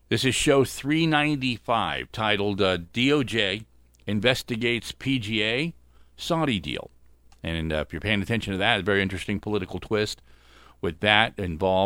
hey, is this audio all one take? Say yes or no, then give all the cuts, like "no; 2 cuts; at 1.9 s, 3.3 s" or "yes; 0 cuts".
yes; 0 cuts